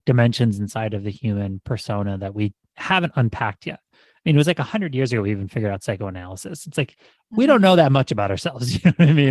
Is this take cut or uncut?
uncut